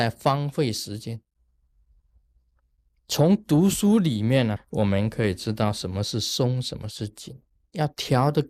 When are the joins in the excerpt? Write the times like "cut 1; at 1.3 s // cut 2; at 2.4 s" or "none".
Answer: cut 1; at 4.6 s